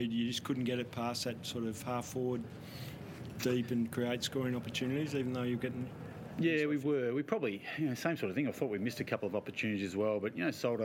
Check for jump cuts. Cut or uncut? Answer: uncut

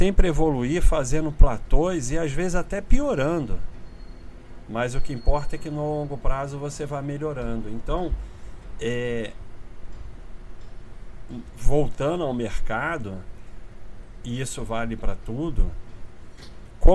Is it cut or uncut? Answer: uncut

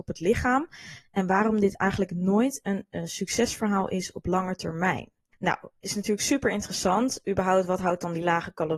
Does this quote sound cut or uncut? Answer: uncut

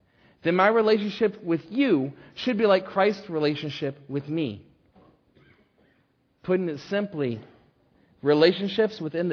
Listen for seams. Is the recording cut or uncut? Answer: uncut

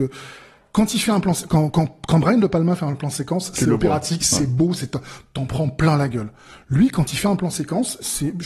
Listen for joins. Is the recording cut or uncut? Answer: uncut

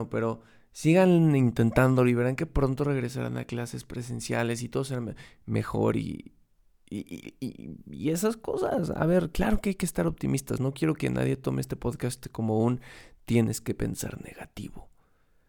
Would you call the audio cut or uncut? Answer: uncut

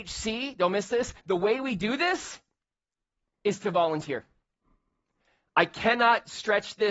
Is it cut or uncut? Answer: cut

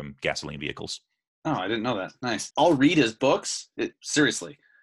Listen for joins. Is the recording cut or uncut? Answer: cut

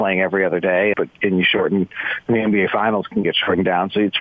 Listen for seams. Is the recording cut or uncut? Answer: cut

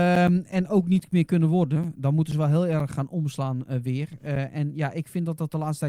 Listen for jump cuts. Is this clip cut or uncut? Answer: uncut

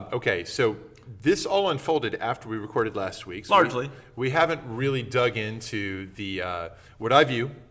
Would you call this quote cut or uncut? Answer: uncut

